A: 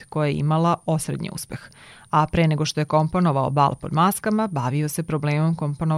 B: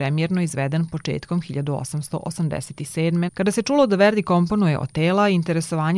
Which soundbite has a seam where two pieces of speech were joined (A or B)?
B